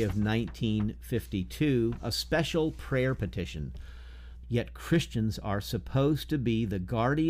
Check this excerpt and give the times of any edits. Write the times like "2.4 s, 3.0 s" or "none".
4.4 s